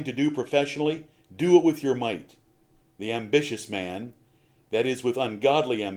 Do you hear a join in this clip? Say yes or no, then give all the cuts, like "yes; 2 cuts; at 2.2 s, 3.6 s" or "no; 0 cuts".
yes; 1 cut; at 2.9 s